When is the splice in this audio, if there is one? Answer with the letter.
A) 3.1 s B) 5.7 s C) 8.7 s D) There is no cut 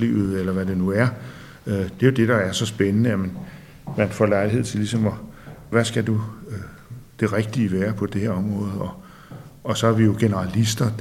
B